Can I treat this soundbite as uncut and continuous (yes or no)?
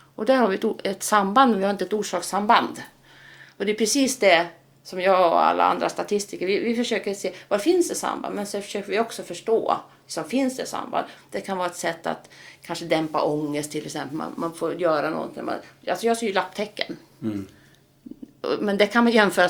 no